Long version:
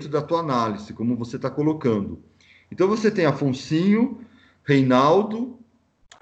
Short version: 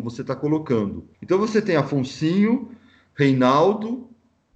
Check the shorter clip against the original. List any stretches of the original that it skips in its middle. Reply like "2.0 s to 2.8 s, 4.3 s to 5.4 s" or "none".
2.3 s to 2.6 s